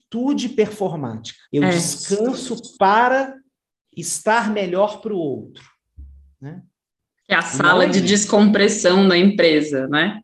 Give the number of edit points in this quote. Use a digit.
1